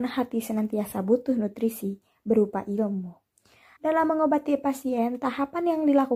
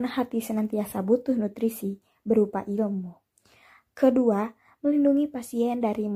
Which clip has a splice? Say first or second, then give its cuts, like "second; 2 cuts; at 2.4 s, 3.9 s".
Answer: first; 1 cut; at 3.8 s